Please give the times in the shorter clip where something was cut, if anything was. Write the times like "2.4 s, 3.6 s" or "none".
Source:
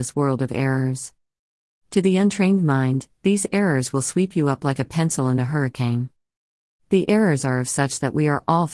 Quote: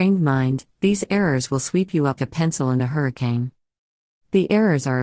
2.2 s